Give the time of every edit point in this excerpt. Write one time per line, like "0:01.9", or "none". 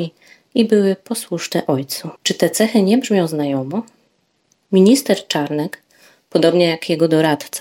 0:02.2